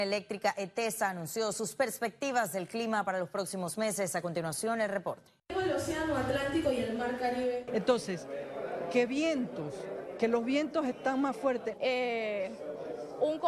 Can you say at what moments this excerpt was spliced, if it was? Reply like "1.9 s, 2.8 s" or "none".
5.4 s, 7.7 s, 11.7 s